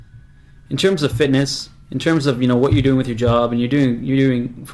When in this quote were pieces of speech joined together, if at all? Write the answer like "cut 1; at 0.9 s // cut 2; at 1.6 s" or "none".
none